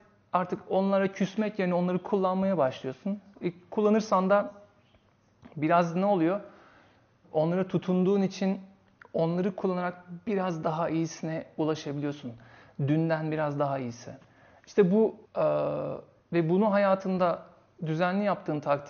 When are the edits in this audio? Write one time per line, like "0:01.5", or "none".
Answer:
0:07.2
0:15.3